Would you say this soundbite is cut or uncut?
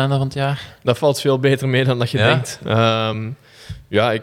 uncut